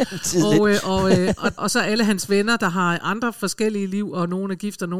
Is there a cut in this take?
yes; 1 cut; at 1.6 s

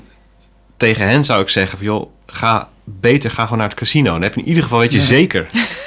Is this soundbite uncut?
yes; 0 cuts

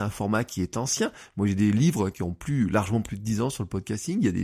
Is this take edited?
no; 0 cuts

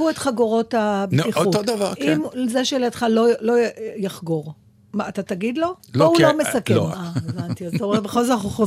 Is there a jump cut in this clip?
yes; 2 cuts; at 5.8 s, 6.9 s

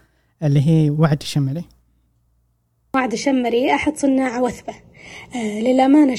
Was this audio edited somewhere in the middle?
no; 0 cuts

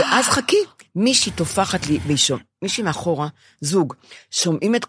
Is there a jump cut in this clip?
no; 0 cuts

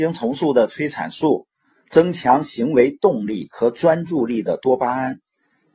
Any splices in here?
no; 0 cuts

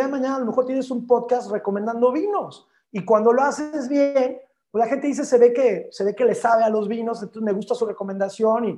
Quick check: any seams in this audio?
no; 0 cuts

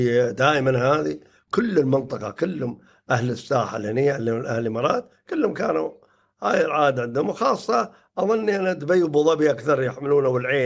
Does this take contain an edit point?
no; 0 cuts

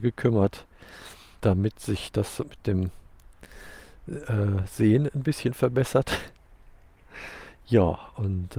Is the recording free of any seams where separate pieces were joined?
no; 1 cut; at 1.4 s

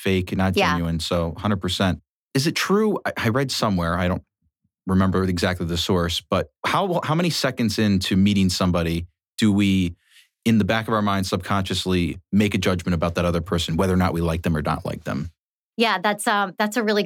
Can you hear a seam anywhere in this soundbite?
yes; 1 cut; at 6.6 s

